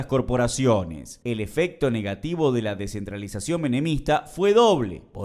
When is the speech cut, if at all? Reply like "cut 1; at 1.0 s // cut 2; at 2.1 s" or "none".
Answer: cut 1; at 1.2 s